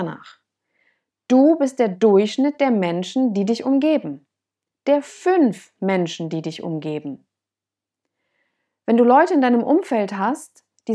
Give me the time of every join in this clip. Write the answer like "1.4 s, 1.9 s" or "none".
none